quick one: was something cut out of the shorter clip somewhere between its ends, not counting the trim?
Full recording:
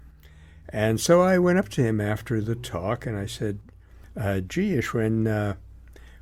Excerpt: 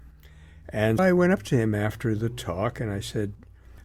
yes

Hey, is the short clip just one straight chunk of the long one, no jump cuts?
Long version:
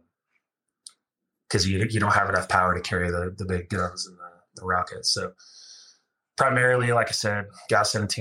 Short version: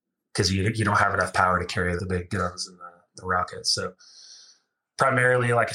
no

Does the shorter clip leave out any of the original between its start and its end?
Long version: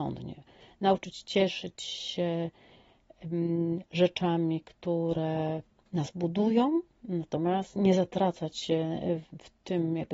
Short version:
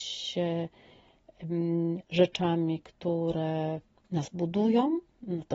no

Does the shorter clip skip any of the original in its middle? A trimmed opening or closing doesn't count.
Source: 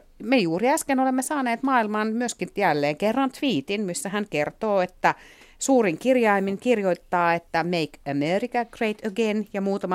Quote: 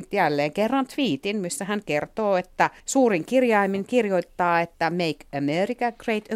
yes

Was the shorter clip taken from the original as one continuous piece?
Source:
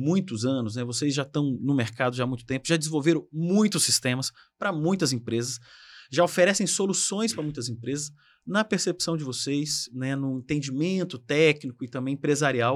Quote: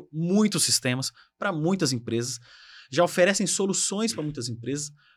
yes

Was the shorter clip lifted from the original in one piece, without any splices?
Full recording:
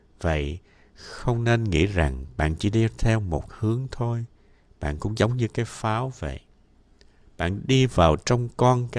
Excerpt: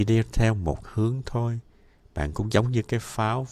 yes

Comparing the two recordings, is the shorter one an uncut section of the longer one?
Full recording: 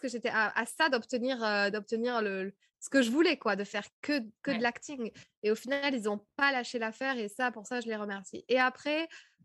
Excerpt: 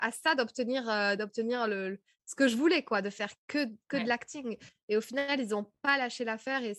yes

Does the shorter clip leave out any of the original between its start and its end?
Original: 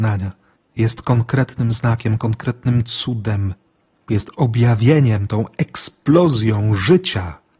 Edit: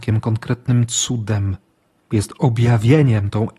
no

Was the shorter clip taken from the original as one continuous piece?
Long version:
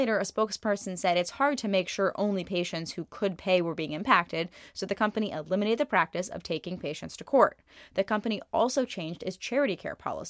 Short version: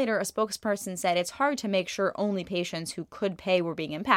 yes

